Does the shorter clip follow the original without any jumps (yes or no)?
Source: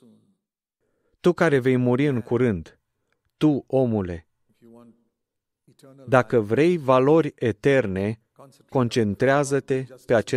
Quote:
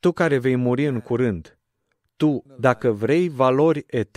no